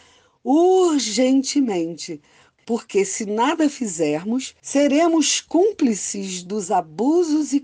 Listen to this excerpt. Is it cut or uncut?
uncut